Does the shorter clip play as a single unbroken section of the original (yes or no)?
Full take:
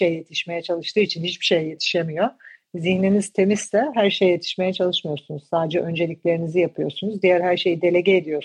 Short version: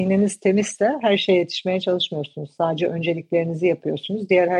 yes